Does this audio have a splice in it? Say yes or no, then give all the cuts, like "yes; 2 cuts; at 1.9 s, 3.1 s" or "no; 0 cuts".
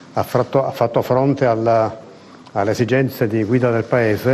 no; 0 cuts